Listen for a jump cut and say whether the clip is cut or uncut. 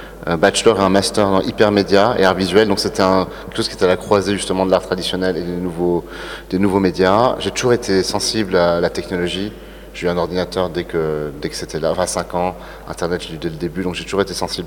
uncut